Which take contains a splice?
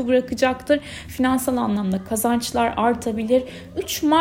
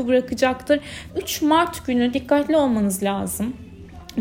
second; 1 cut; at 1.1 s

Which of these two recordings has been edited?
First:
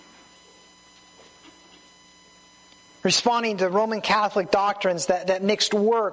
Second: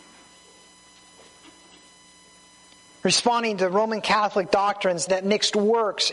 second; 1 cut; at 5.1 s

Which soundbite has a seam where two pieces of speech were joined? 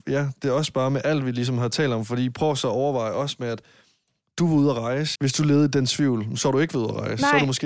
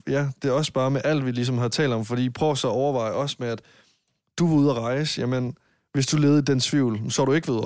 first; 1 cut; at 5.2 s

